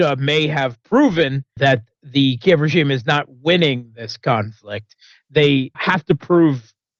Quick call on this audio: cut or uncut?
cut